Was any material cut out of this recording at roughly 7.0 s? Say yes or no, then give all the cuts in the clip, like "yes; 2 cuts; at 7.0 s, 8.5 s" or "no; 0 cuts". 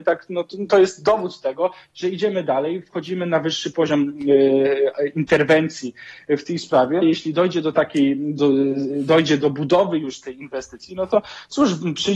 yes; 1 cut; at 7.0 s